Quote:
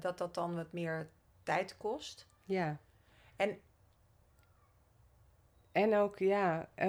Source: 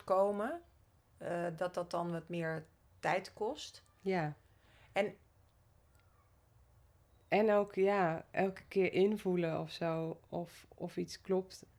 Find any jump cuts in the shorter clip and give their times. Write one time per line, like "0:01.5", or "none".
none

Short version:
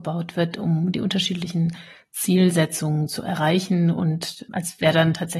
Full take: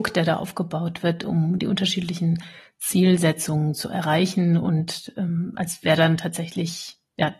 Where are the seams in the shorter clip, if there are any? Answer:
0:04.5

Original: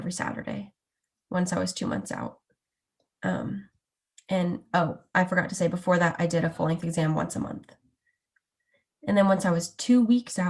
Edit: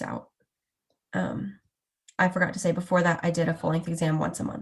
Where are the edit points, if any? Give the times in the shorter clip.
0:02.2

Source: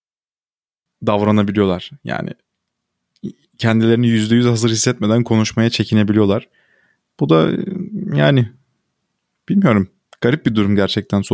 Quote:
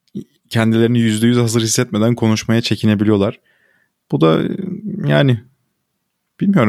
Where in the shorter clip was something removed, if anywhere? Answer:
none

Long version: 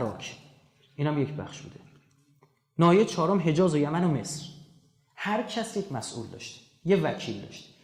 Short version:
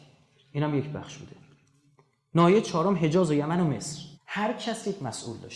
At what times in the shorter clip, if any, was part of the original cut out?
0:04.1

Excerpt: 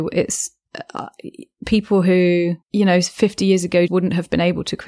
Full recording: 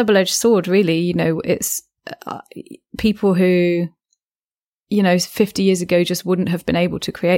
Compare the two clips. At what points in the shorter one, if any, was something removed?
0:02.6
0:03.9

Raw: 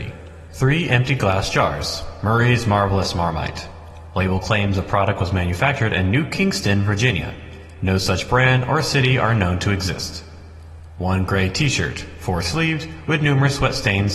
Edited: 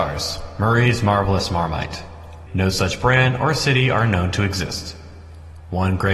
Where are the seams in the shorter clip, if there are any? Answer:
0:02.5

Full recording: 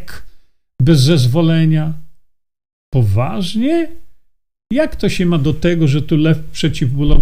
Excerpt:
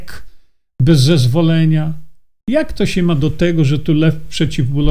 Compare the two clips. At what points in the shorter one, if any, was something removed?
0:02.4

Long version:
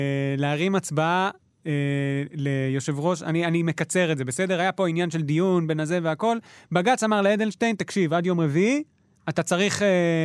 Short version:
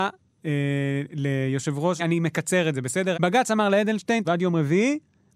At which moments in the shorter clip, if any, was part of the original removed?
0:02.0
0:03.1
0:04.2

